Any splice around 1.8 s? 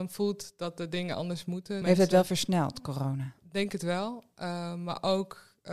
yes; 1 cut; at 1.8 s

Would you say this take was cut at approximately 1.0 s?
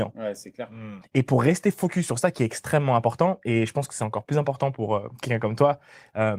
yes; 1 cut; at 1.0 s

